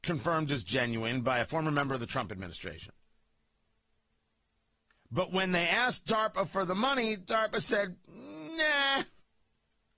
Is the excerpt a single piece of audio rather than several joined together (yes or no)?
yes